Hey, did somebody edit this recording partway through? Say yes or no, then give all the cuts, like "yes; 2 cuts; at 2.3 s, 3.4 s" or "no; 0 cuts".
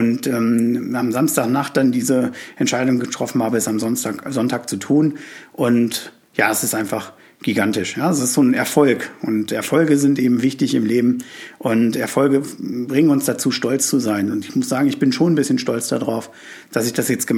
no; 0 cuts